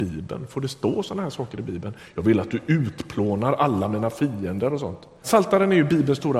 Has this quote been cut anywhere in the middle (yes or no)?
yes